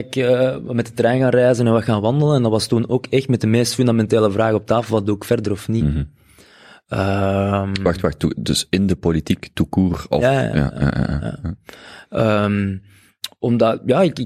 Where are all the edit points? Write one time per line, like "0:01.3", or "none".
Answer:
none